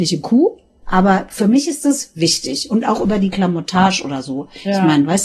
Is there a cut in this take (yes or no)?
no